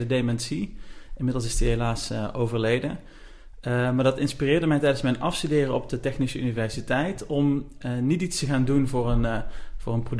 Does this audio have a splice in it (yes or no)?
no